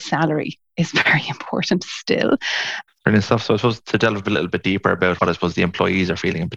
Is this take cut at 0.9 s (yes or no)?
no